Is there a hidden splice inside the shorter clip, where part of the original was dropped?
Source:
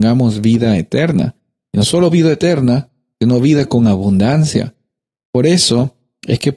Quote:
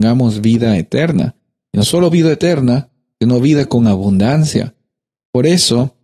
no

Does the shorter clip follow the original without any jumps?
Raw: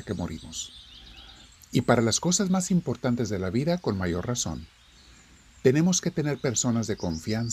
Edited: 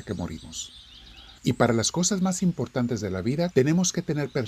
no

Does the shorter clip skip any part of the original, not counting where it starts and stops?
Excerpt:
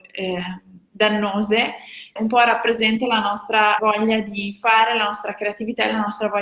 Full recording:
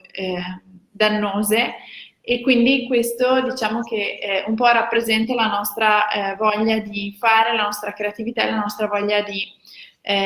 yes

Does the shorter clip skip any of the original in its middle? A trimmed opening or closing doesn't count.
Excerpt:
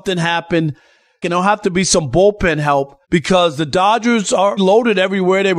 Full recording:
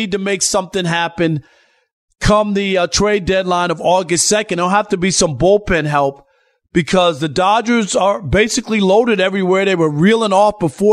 yes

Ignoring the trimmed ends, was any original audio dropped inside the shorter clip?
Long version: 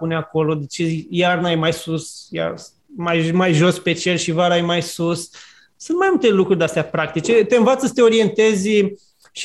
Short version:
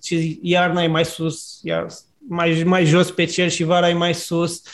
no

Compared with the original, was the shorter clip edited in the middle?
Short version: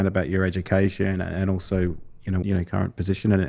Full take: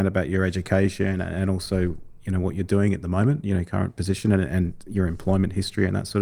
yes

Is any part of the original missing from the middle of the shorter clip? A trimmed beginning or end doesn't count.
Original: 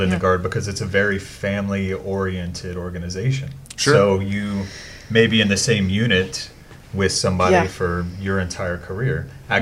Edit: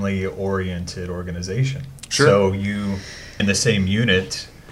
yes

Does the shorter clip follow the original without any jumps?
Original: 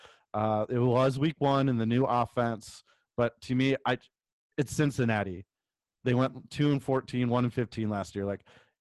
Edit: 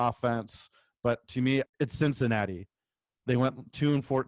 no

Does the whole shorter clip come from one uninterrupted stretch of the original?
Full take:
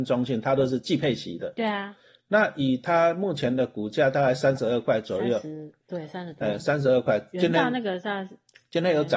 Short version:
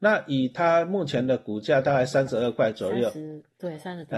yes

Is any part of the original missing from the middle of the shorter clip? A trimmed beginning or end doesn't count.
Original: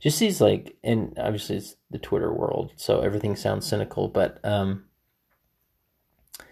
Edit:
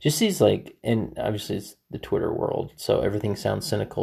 no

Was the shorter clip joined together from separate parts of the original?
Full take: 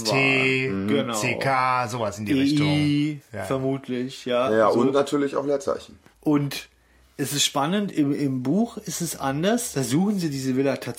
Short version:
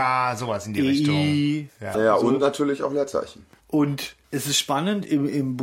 yes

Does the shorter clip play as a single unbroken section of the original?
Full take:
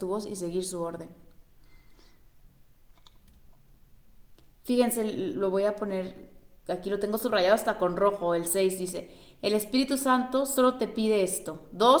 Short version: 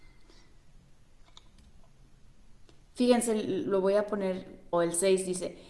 no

